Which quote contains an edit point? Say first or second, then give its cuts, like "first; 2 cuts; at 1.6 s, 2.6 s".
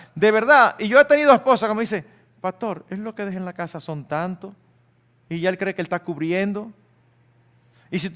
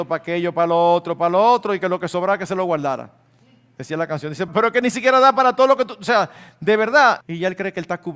second; 2 cuts; at 4.5 s, 7.2 s